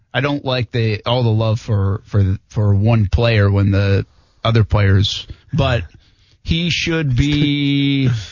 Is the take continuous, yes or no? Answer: no